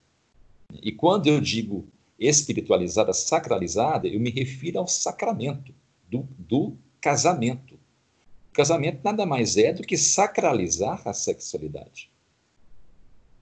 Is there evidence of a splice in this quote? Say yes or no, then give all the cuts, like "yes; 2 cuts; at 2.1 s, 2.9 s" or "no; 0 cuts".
no; 0 cuts